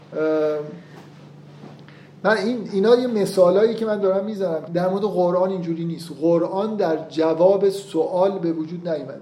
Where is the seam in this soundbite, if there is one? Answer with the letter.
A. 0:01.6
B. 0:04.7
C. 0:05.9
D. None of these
B